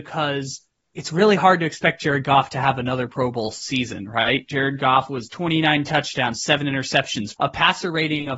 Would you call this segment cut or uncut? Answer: cut